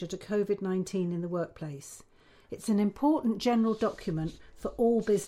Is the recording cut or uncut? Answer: uncut